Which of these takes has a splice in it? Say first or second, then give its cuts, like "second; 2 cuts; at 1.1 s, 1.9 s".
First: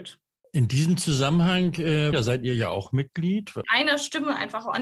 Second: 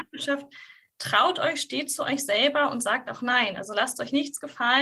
first; 2 cuts; at 2.1 s, 3.6 s